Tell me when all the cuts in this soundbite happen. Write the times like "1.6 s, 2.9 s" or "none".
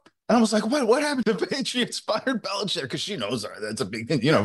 1.2 s

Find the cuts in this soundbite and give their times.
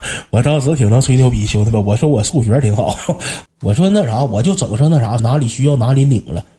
3.5 s, 5.2 s

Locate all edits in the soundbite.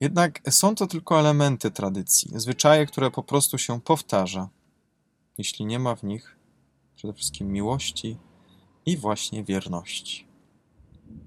none

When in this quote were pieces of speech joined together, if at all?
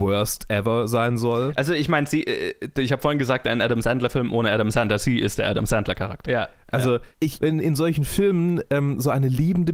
6.3 s, 7.4 s

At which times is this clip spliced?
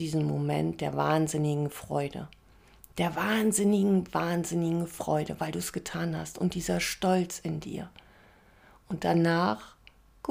none

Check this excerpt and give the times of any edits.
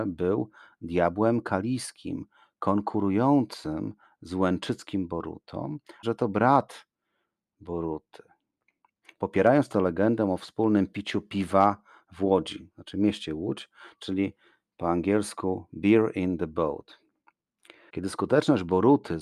6.0 s, 17.9 s

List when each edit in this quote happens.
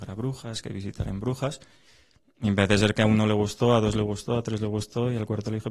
none

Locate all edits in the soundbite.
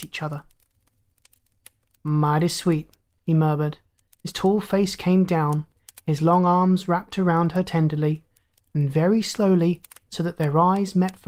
none

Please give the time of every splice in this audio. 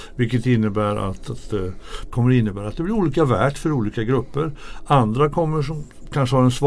2.1 s

